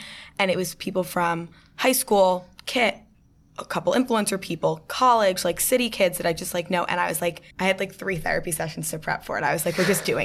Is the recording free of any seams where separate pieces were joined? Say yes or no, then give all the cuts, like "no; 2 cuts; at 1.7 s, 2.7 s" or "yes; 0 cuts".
no; 1 cut; at 7.5 s